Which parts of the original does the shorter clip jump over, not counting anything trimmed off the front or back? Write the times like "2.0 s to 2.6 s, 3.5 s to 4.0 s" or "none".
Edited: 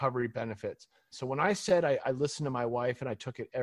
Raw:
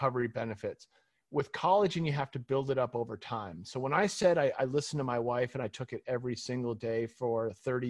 1.1 s to 3.6 s